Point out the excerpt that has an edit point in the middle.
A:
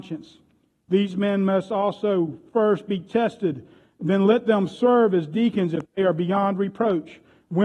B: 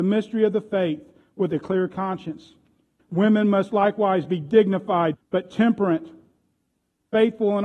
B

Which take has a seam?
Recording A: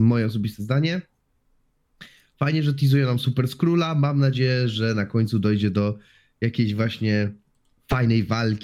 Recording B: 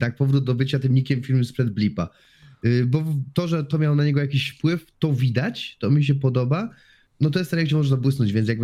B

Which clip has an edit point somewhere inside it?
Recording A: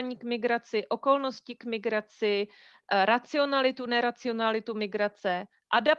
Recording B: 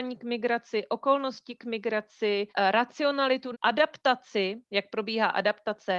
B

